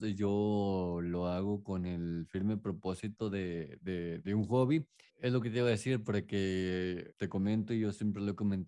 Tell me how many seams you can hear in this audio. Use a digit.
2